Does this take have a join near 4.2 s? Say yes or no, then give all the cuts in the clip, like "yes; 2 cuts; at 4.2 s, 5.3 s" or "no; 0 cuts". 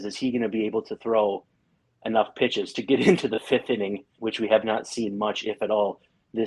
yes; 1 cut; at 4.2 s